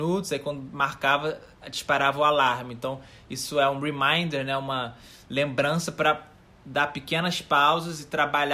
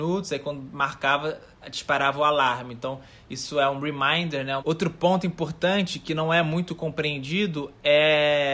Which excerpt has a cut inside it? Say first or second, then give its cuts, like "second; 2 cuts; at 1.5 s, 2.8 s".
second; 1 cut; at 4.6 s